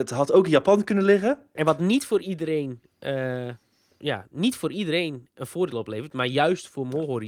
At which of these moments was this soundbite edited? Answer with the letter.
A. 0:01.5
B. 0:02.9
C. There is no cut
A